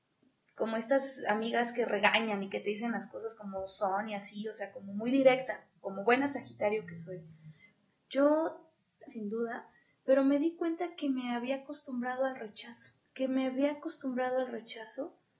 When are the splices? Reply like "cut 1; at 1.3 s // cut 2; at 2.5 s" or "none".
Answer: cut 1; at 7.9 s // cut 2; at 9.1 s // cut 3; at 13.1 s